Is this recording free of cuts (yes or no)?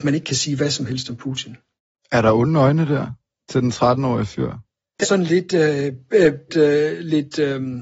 no